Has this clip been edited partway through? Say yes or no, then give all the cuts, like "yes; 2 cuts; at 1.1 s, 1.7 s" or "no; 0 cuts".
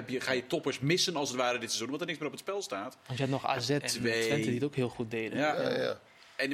yes; 1 cut; at 3.8 s